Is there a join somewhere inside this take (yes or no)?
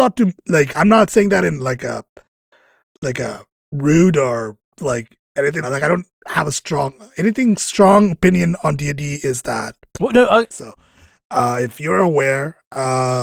yes